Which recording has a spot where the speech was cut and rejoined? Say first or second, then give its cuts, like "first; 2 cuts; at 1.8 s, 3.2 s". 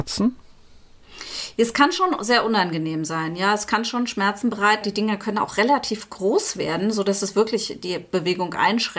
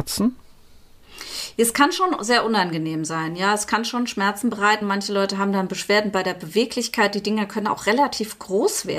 first; 1 cut; at 4.8 s